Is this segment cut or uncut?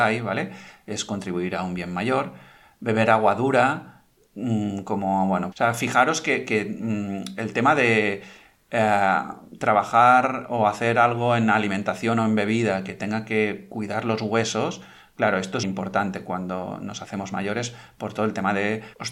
cut